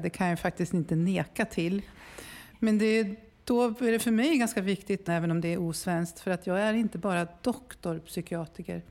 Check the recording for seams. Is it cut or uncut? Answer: cut